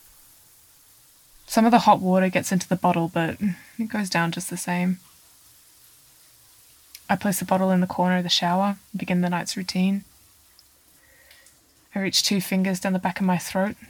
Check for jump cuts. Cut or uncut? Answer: uncut